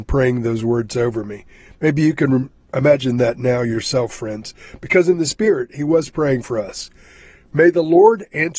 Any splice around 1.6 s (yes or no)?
no